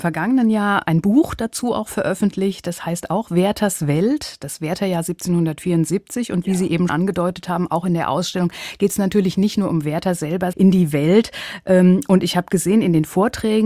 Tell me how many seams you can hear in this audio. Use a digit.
2